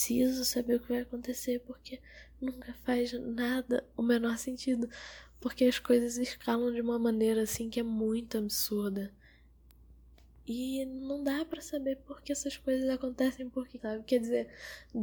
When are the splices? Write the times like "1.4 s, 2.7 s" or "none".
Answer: 12.2 s, 13.8 s